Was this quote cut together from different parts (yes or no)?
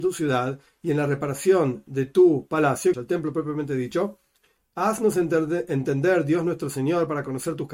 yes